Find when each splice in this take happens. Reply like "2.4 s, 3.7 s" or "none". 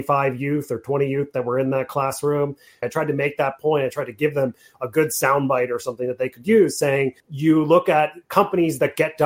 2.8 s, 7.2 s